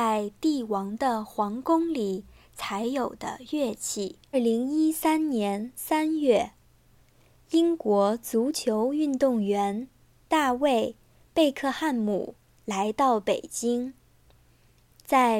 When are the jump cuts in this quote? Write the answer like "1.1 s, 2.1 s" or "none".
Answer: 4.3 s